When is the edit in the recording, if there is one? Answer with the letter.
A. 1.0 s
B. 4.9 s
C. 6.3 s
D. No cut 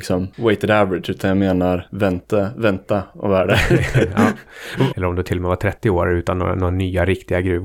B